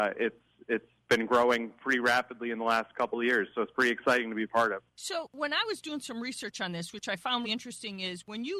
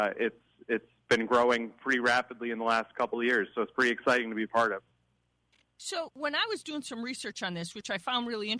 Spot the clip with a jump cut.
first; 2 cuts; at 4.9 s, 7.4 s

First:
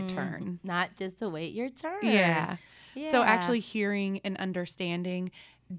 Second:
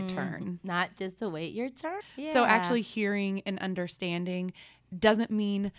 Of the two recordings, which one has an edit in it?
second; 1 cut; at 2.0 s

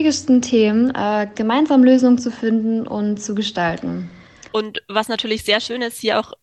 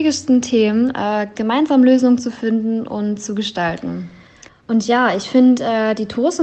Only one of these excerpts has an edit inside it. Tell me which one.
first; 1 cut; at 4.5 s

